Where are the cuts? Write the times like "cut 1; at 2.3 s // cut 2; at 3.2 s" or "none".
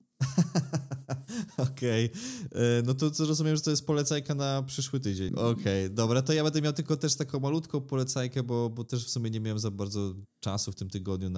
cut 1; at 5.3 s

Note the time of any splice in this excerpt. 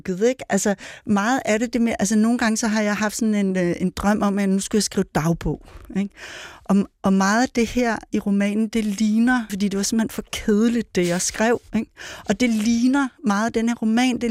cut 1; at 9.5 s

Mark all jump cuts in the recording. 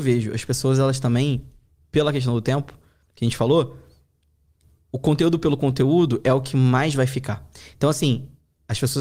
none

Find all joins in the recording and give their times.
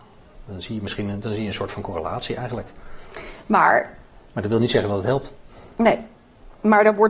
none

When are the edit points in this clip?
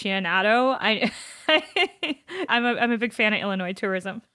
cut 1; at 2.5 s

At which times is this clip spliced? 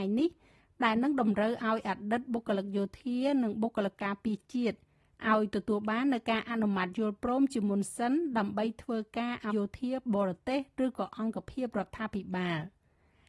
cut 1; at 9.5 s

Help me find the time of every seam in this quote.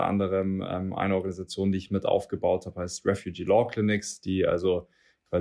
none

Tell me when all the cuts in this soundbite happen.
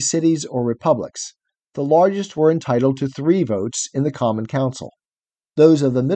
none

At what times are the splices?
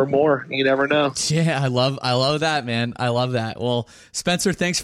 none

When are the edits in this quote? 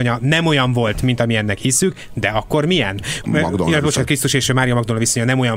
cut 1; at 3.2 s

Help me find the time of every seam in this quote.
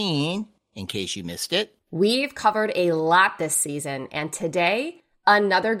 cut 1; at 1.8 s

